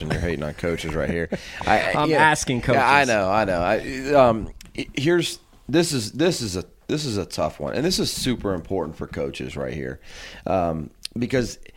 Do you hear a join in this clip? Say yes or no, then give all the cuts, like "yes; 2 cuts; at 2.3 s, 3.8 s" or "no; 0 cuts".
no; 0 cuts